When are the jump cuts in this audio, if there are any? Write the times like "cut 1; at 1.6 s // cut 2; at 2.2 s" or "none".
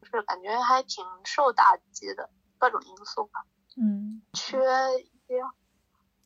cut 1; at 4.2 s